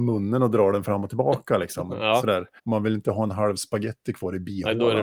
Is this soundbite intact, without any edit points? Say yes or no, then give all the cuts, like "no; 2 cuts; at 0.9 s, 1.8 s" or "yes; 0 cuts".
no; 1 cut; at 2.6 s